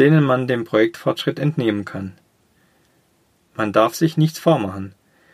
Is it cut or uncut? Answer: uncut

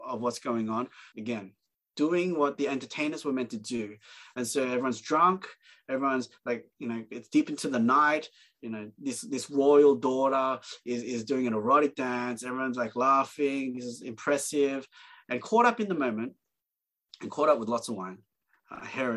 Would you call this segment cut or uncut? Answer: cut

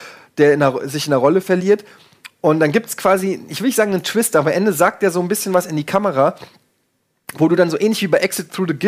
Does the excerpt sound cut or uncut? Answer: uncut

